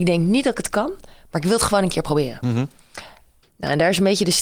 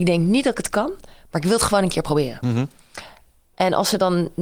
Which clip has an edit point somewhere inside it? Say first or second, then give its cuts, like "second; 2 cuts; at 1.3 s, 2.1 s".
first; 1 cut; at 3.4 s